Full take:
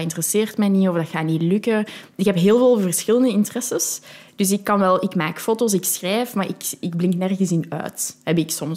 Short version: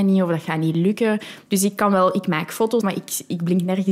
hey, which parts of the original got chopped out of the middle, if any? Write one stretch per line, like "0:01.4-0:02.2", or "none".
0:02.1-0:04.3
0:05.7-0:06.3